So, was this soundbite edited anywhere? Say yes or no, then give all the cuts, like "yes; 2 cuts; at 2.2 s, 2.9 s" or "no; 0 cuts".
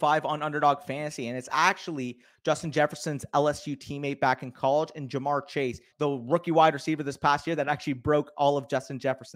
yes; 1 cut; at 5.9 s